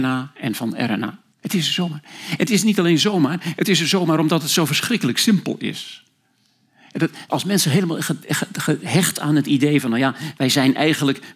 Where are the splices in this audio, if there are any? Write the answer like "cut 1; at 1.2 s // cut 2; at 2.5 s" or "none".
cut 1; at 1.3 s // cut 2; at 7.3 s